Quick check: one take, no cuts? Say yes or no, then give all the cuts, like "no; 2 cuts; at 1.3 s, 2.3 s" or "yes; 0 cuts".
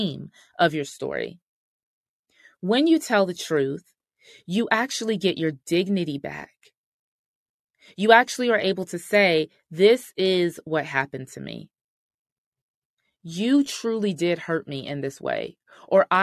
yes; 0 cuts